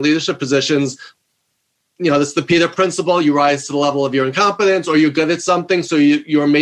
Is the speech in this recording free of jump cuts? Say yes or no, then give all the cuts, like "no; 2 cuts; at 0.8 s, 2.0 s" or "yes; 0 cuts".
yes; 0 cuts